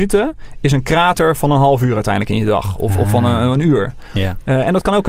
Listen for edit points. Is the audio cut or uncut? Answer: uncut